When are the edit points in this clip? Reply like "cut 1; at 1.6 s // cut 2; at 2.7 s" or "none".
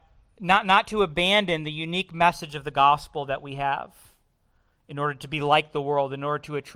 none